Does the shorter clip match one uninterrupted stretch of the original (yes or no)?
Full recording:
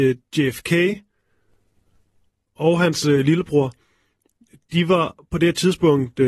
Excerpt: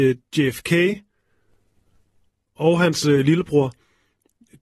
yes